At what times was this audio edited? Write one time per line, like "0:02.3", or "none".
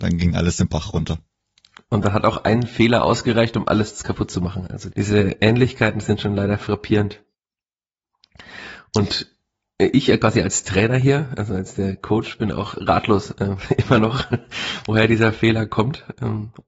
0:04.9